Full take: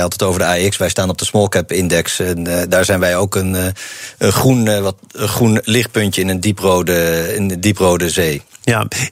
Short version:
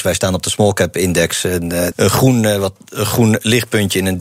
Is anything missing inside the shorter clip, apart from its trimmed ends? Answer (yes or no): yes